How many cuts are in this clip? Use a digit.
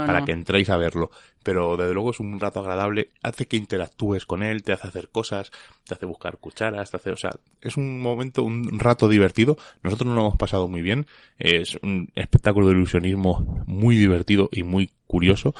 0